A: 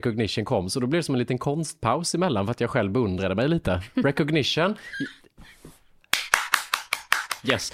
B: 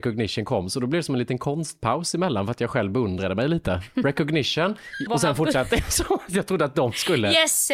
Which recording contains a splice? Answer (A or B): B